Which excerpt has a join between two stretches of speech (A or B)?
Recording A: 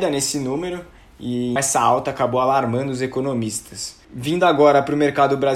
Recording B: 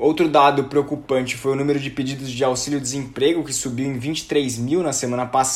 A